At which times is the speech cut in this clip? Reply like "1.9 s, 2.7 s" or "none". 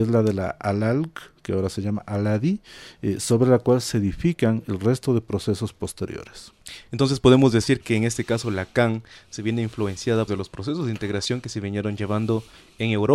10.3 s